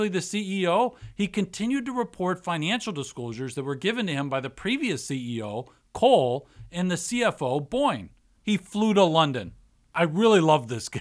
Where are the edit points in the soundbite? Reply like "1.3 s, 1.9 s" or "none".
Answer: 8.4 s